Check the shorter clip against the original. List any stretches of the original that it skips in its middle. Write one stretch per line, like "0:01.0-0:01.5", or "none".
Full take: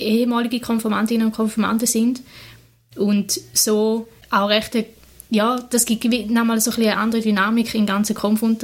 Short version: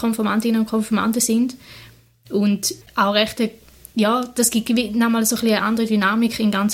0:03.5-0:04.2